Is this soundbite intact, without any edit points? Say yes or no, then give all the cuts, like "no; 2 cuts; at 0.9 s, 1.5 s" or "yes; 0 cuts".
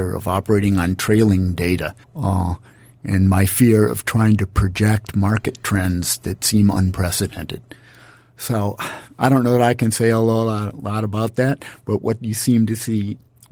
no; 1 cut; at 2.0 s